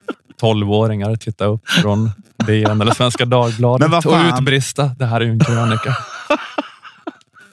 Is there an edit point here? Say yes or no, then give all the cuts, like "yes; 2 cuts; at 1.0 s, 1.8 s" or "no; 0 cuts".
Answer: no; 0 cuts